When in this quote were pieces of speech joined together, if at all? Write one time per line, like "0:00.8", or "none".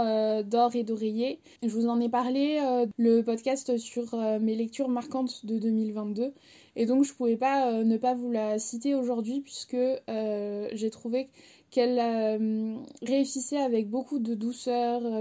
0:01.6